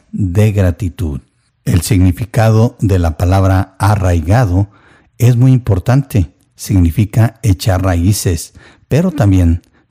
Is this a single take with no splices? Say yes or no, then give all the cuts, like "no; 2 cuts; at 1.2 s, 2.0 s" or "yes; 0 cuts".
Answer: yes; 0 cuts